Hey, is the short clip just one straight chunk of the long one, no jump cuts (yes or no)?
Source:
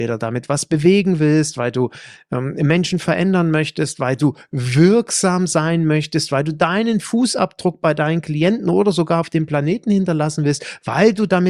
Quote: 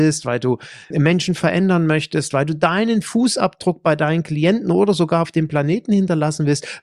no